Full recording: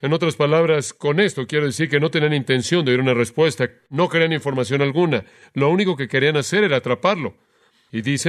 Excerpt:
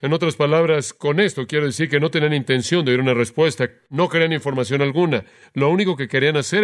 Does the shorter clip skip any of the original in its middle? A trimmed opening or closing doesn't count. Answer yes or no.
no